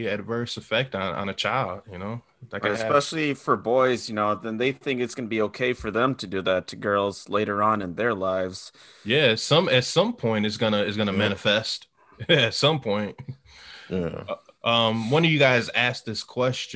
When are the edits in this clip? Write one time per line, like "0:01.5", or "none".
none